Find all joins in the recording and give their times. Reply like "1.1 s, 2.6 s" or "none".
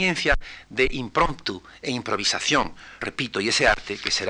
3.0 s

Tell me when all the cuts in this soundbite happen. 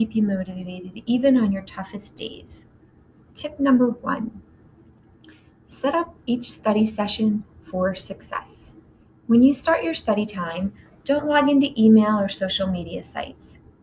none

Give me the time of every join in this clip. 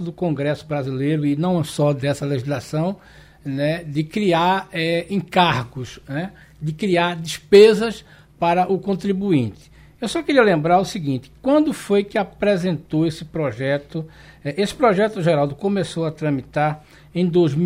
none

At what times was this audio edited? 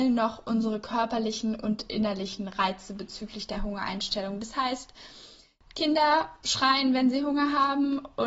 none

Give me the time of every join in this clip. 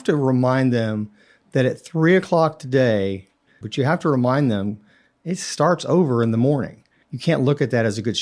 3.6 s, 7.0 s

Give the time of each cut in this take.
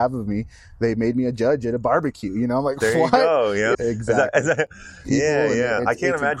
3.7 s

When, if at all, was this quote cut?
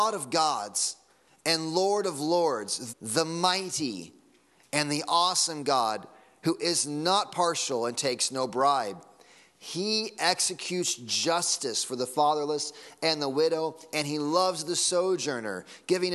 2.9 s

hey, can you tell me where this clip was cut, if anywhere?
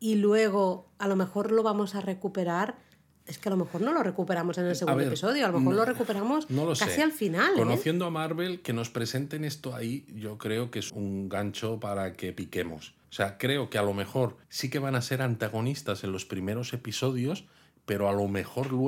10.9 s, 13.0 s, 14.4 s

